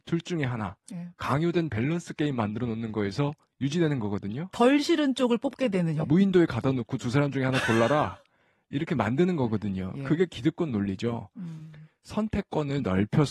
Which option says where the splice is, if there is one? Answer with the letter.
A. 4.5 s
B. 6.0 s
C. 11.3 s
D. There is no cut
B